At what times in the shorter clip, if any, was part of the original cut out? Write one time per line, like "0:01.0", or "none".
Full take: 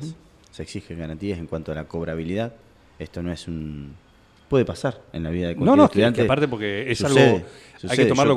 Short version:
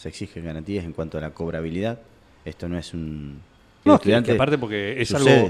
0:03.9